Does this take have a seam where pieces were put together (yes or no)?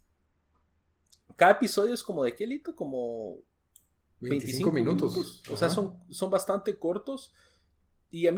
no